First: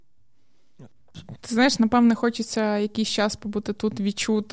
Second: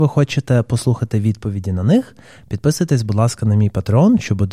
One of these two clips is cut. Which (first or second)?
first